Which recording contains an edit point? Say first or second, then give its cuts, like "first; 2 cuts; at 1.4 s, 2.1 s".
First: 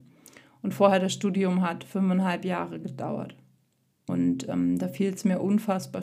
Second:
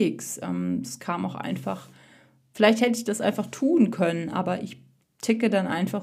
first; 1 cut; at 4.1 s